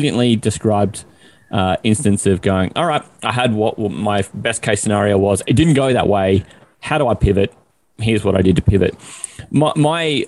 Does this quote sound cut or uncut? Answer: uncut